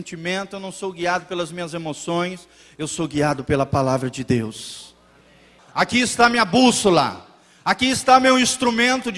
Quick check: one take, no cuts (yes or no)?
no